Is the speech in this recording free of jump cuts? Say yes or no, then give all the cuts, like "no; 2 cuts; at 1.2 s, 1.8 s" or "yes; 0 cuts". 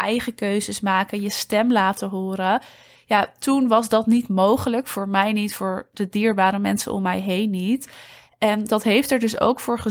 yes; 0 cuts